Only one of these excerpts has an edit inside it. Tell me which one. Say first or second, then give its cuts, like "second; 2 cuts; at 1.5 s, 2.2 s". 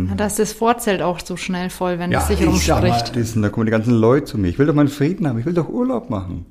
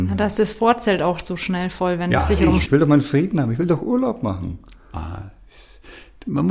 second; 1 cut; at 2.6 s